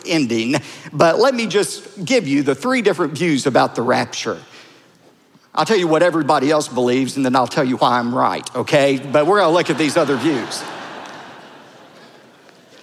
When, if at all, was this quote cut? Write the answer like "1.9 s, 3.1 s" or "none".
none